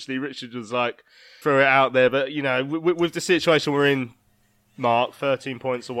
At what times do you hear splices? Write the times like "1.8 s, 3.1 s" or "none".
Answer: 1.4 s